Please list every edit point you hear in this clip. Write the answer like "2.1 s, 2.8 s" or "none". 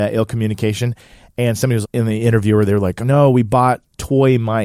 1.8 s, 3.0 s